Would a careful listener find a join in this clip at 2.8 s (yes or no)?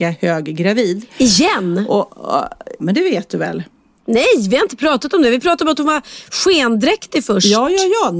yes